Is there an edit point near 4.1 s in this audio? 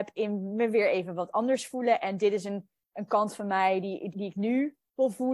yes; 1 cut; at 4.1 s

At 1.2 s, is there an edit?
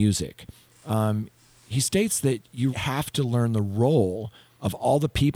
no; 1 cut; at 2.7 s

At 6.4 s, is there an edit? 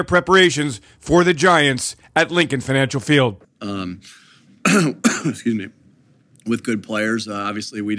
no; 1 cut; at 3.4 s

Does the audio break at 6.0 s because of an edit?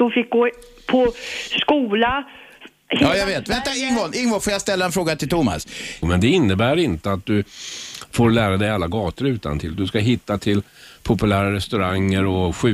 yes; 1 cut; at 6.0 s

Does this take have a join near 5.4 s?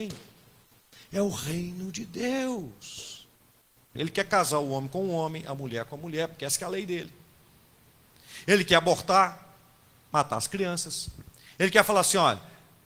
no; 1 cut; at 4.0 s

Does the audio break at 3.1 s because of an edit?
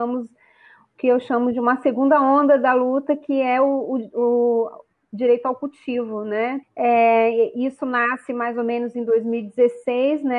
no; 1 cut; at 6.6 s

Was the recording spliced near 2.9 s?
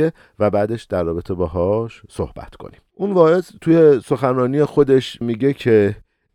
yes; 1 cut; at 2.9 s

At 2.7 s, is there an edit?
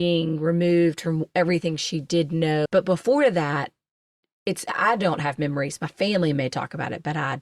yes; 2 cuts; at 2.7 s, 4.7 s

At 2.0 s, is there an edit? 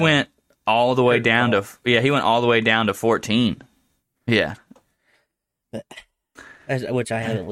no; 1 cut; at 4.1 s

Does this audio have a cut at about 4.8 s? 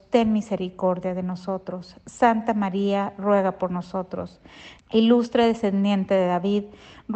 yes; 1 cut; at 4.8 s

